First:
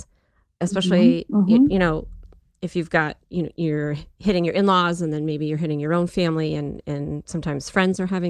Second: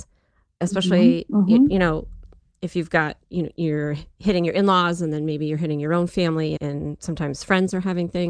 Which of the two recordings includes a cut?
second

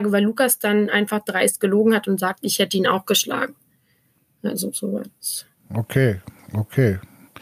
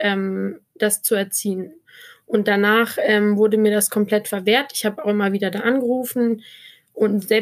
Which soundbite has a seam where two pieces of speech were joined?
first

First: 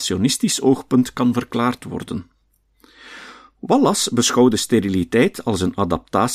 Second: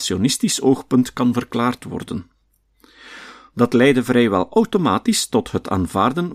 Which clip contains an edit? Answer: second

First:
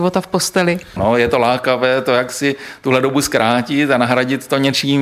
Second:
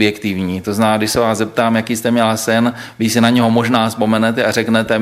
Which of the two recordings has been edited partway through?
first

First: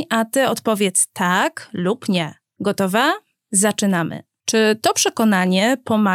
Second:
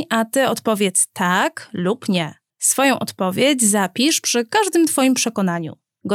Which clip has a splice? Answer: first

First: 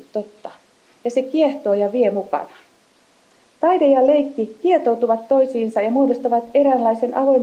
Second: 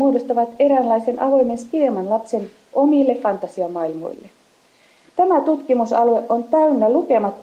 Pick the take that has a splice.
second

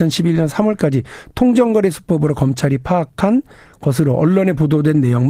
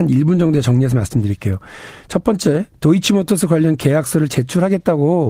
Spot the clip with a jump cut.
second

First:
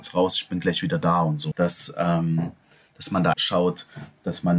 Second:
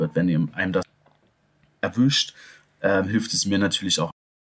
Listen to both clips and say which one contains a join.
first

